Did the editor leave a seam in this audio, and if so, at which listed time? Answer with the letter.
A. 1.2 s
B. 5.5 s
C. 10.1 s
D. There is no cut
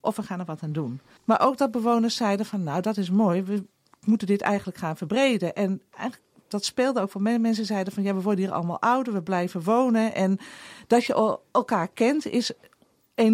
A